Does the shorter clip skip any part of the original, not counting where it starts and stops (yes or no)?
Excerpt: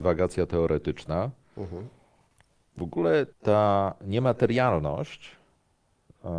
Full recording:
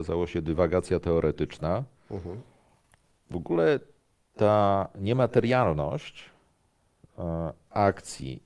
yes